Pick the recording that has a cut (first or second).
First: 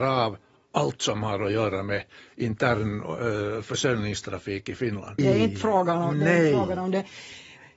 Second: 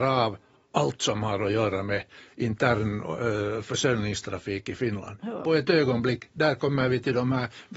first